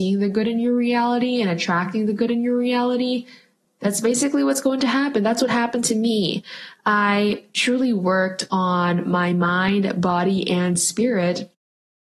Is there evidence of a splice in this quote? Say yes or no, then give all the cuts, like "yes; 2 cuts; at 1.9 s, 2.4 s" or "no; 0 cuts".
no; 0 cuts